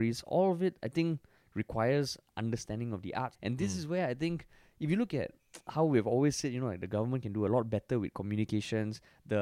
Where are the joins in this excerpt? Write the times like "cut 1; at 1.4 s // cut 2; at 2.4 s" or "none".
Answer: cut 1; at 3.3 s